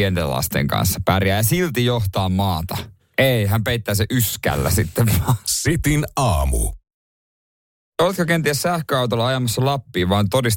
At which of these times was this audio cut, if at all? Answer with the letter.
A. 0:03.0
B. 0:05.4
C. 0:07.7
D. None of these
A